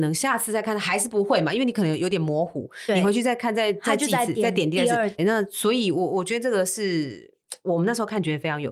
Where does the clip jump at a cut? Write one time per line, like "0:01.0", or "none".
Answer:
0:05.2